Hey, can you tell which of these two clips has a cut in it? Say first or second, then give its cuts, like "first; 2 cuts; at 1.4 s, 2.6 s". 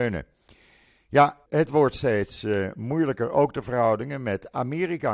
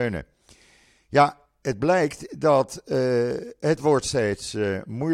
first; 1 cut; at 1.5 s